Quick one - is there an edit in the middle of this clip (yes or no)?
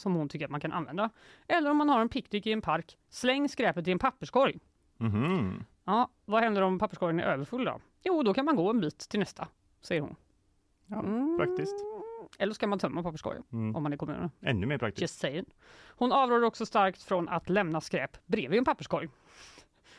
no